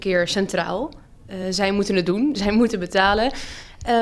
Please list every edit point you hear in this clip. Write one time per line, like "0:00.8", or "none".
none